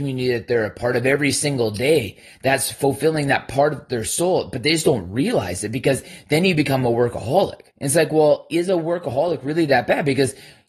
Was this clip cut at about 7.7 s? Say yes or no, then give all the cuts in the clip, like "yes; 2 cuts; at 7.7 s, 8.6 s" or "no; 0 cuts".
yes; 1 cut; at 7.7 s